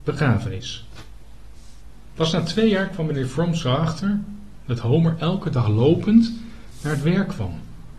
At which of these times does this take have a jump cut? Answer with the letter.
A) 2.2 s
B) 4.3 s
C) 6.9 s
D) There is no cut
A